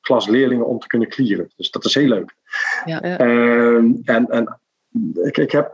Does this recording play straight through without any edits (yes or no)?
no